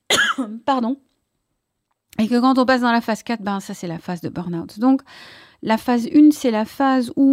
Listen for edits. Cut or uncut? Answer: uncut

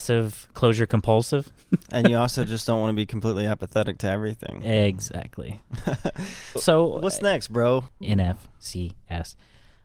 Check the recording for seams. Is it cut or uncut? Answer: cut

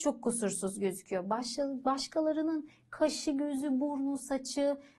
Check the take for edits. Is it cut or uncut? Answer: uncut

